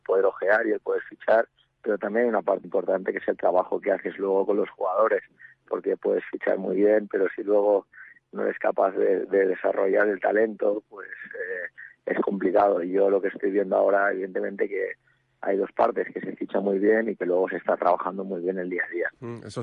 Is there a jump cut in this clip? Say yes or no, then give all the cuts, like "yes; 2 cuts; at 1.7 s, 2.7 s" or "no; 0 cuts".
yes; 1 cut; at 2.6 s